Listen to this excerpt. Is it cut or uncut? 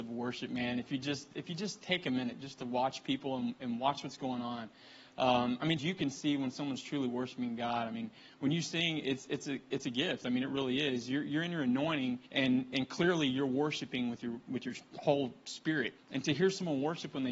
cut